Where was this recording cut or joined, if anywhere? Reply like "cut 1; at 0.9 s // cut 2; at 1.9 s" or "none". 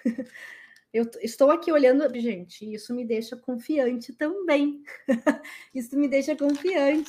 cut 1; at 2.1 s

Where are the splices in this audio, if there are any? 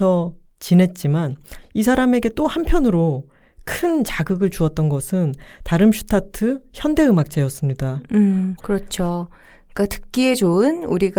cut 1; at 8.6 s

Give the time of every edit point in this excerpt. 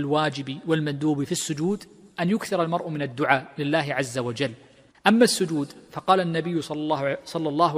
cut 1; at 4.9 s

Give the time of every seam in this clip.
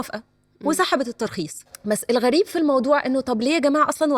cut 1; at 1.7 s

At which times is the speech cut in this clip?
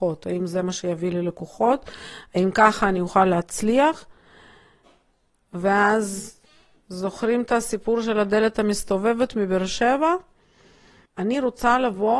cut 1; at 11.1 s

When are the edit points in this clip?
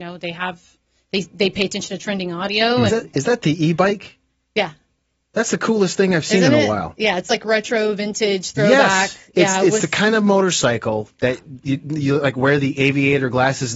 cut 1; at 2.9 s

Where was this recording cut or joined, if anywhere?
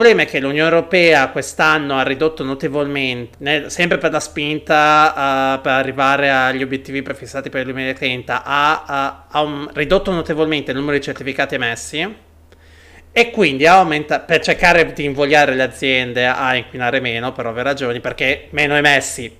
cut 1; at 3.3 s

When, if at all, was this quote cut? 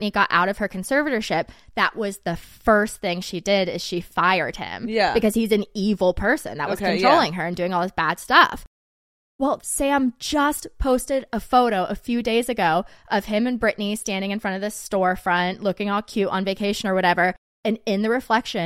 cut 1; at 9.6 s

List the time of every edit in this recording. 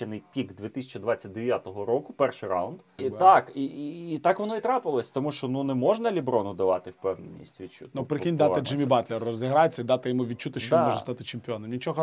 cut 1; at 3.0 s // cut 2; at 7.9 s

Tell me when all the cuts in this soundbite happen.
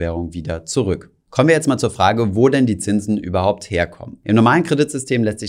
none

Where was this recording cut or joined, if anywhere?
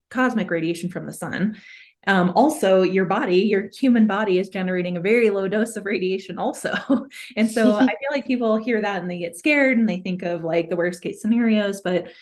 none

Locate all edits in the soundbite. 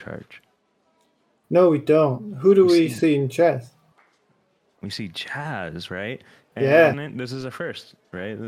cut 1; at 6.9 s

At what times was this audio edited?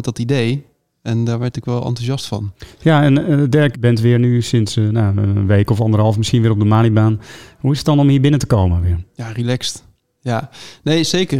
cut 1; at 3.7 s

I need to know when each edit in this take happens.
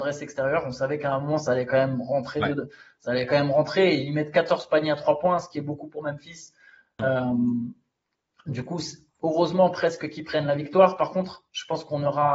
none

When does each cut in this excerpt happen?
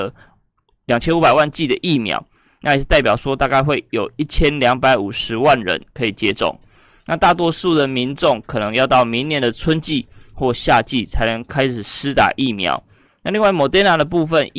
none

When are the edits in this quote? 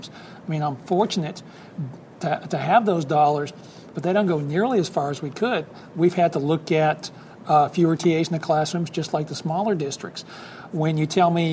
none

